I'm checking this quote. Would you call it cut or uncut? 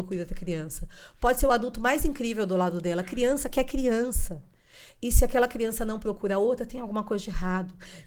uncut